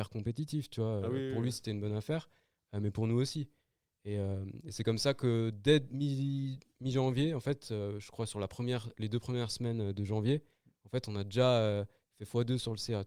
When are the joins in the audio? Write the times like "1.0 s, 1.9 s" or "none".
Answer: none